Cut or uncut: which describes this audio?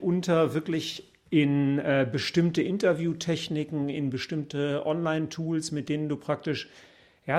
uncut